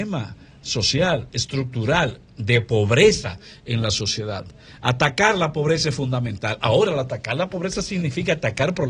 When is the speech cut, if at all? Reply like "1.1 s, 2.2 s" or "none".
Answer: none